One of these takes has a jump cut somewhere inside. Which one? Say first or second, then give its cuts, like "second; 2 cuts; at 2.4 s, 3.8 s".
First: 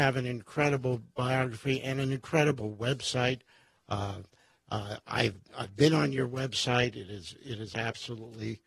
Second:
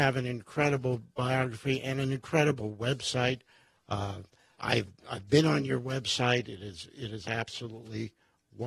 second; 1 cut; at 4.6 s